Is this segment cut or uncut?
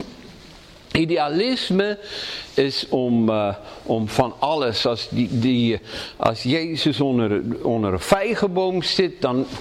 uncut